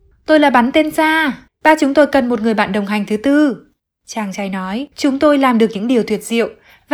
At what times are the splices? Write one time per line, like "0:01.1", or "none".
0:01.5
0:04.9

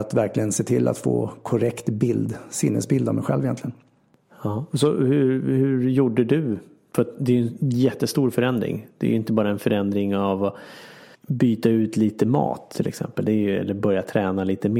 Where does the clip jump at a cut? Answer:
0:11.1

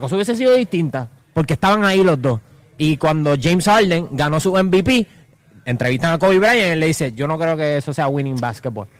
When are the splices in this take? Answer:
none

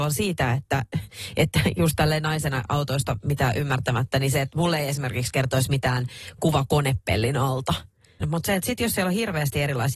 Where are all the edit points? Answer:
0:08.2

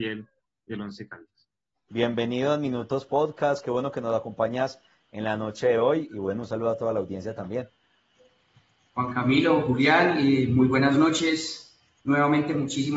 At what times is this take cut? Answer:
0:01.9

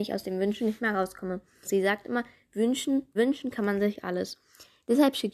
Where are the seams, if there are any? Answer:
0:01.6
0:03.2

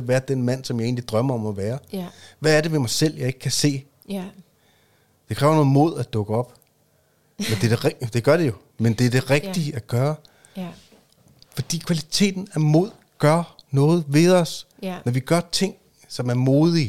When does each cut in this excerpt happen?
none

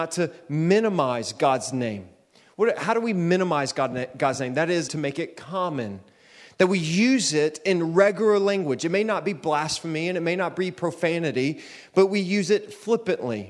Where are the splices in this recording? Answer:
0:04.9

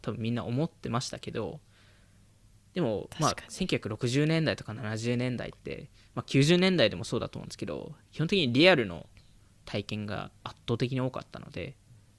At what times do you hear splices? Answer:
none

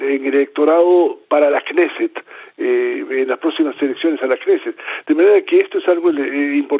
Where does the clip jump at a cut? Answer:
none

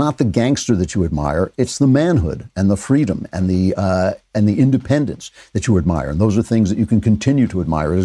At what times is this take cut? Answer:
none

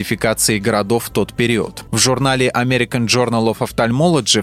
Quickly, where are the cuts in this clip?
0:01.9

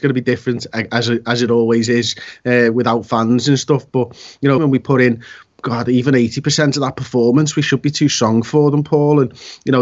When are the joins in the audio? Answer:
0:04.6

